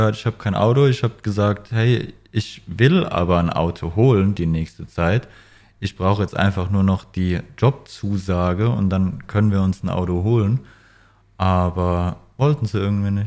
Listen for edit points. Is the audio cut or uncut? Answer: uncut